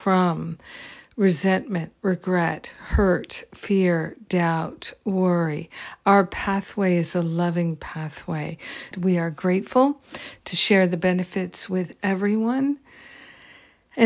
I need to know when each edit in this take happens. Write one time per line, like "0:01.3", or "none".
0:08.9